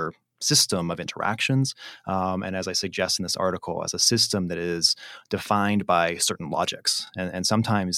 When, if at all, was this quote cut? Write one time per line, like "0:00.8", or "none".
none